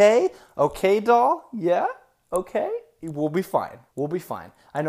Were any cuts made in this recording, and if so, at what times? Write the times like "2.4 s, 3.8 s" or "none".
3.9 s